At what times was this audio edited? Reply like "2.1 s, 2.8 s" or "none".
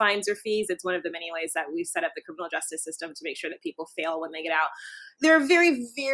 none